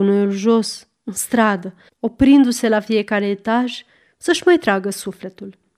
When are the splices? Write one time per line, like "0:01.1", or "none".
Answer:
0:01.9